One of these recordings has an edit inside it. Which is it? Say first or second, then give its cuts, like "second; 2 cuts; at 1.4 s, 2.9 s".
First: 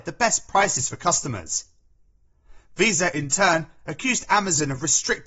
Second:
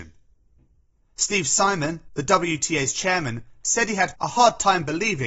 second; 1 cut; at 4.1 s